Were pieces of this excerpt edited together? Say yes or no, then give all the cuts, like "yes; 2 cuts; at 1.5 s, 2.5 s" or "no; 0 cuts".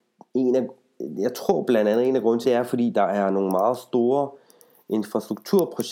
yes; 1 cut; at 2.4 s